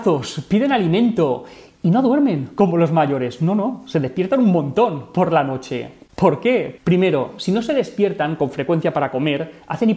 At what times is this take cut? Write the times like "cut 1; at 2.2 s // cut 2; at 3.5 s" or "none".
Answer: cut 1; at 6.8 s